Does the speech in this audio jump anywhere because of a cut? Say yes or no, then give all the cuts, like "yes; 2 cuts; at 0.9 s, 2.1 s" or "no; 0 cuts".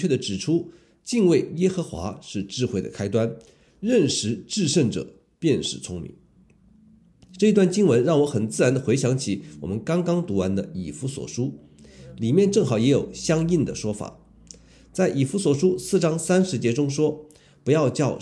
no; 0 cuts